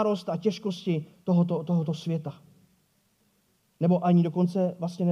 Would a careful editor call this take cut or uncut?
uncut